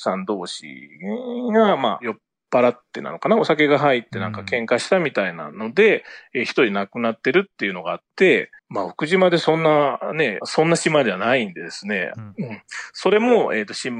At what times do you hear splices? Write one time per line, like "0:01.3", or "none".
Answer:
0:08.6
0:10.4
0:12.1